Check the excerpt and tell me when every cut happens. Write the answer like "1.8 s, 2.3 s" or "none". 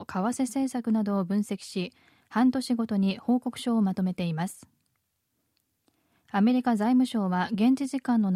none